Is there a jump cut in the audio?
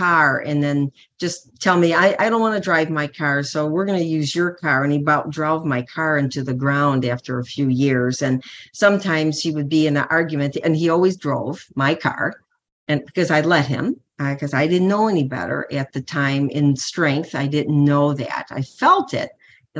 no; 0 cuts

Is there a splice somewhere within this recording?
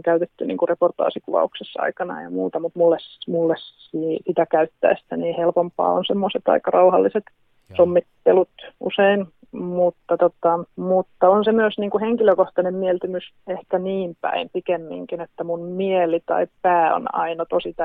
yes; 2 cuts; at 10.7 s, 13.4 s

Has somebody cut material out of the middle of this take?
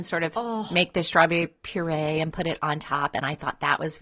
no; 0 cuts

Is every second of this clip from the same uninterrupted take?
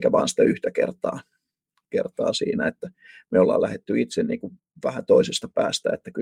yes; 0 cuts

